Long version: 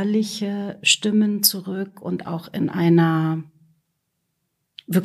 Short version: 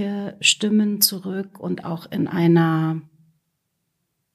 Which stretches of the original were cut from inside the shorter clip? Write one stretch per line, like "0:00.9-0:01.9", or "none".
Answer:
none